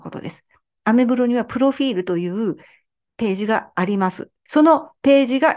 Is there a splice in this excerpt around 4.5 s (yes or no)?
yes